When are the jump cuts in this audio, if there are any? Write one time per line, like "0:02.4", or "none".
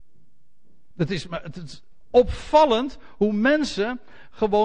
none

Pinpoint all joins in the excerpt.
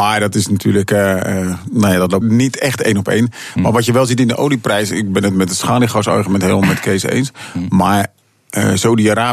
0:02.2

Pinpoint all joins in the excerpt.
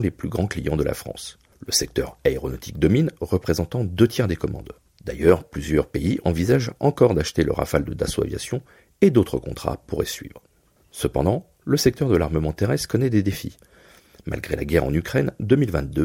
none

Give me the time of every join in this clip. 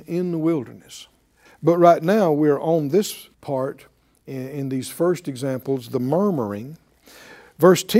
0:01.5
0:03.3

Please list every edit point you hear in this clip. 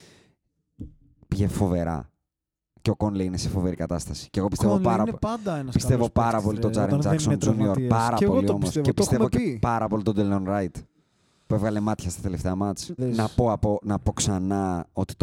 0:13.0

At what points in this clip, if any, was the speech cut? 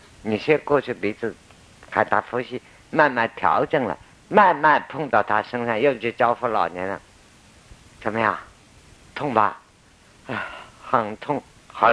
none

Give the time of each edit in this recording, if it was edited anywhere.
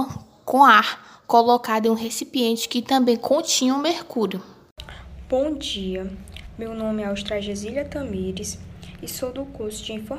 none

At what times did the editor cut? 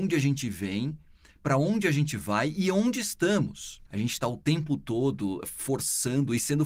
0:03.9
0:05.4

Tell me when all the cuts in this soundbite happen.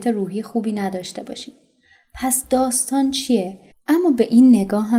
0:03.7

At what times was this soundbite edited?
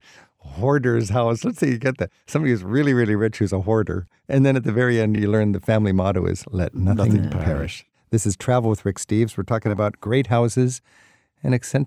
none

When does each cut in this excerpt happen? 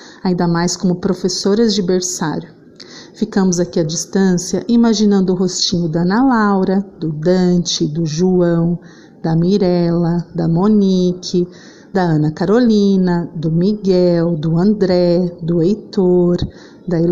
none

